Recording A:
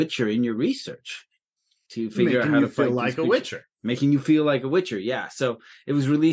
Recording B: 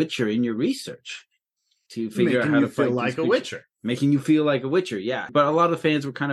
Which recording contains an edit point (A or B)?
B